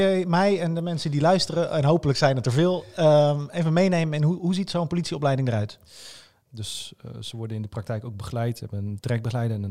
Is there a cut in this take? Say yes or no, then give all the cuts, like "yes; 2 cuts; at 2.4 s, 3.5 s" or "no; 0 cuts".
yes; 1 cut; at 6.5 s